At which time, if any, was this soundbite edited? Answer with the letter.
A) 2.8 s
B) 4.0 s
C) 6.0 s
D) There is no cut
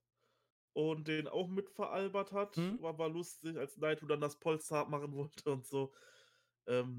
A